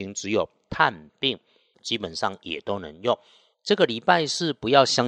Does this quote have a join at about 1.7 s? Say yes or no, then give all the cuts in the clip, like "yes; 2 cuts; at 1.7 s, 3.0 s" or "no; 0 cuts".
yes; 2 cuts; at 1.7 s, 3.5 s